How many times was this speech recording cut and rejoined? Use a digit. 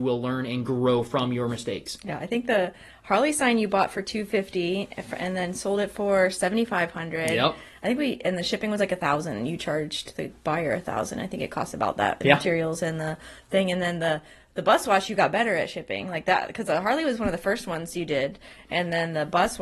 0